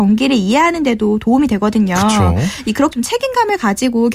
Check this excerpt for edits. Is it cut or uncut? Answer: cut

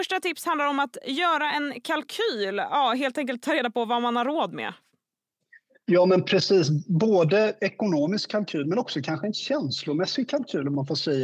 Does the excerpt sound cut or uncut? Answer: uncut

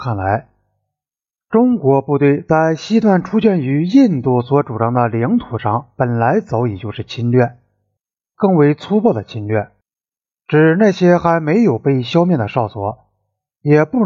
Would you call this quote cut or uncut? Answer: cut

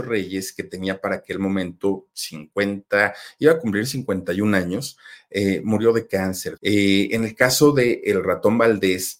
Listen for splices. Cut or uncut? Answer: cut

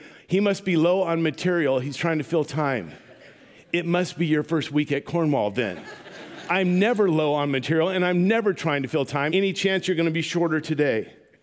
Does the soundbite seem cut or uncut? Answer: cut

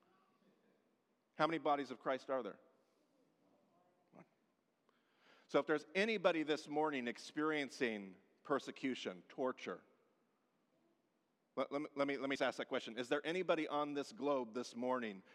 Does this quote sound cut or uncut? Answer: cut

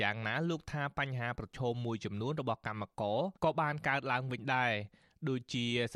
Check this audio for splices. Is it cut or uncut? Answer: cut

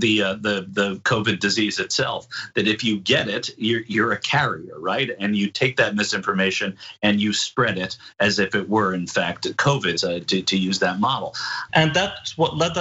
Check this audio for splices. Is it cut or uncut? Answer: cut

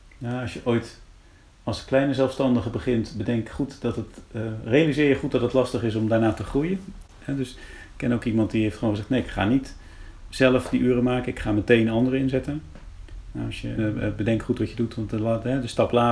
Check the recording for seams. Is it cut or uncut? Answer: cut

